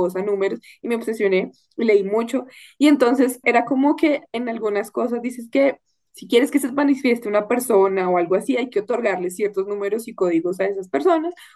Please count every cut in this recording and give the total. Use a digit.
1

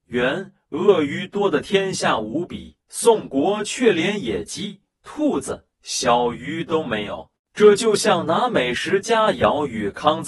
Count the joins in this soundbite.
1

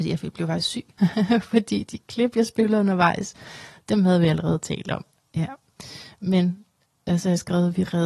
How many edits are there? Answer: 1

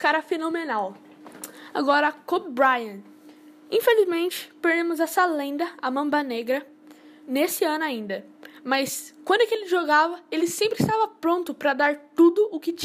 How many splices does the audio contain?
0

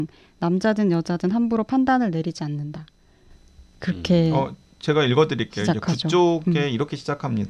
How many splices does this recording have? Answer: 0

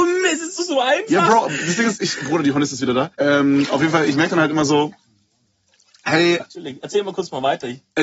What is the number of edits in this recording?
2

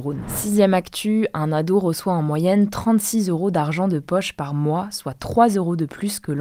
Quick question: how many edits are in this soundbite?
0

